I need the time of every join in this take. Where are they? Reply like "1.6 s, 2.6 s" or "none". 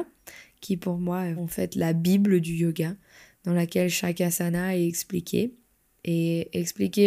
1.4 s